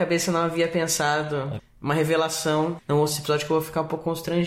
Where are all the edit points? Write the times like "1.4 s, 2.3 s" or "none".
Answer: 1.6 s, 2.8 s